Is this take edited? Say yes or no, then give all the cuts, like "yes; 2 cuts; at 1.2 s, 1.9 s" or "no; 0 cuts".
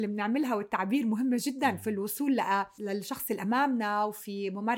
yes; 1 cut; at 2.8 s